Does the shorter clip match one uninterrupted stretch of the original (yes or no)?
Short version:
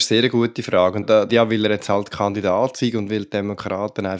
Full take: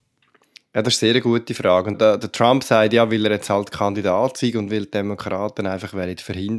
no